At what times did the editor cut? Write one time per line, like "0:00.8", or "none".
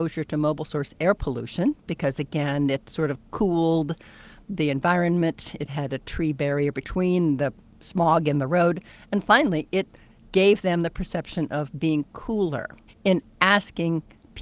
0:12.9